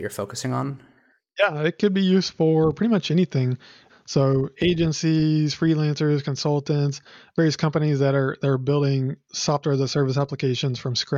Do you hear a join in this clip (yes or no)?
yes